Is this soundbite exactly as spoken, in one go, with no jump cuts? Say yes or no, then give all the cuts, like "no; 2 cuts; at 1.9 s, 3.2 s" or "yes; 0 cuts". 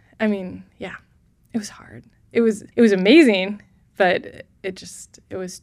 no; 1 cut; at 2.7 s